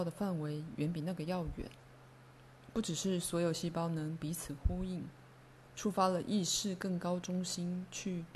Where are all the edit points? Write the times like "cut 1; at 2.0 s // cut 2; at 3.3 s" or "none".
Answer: cut 1; at 5.7 s